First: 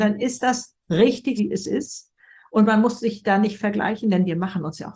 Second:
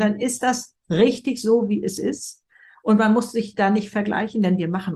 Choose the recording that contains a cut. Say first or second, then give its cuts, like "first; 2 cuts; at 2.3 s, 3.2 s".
first; 1 cut; at 1.4 s